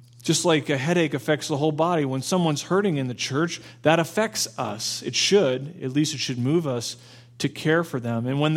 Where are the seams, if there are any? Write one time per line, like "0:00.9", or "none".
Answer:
none

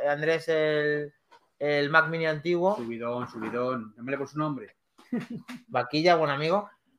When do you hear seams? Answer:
none

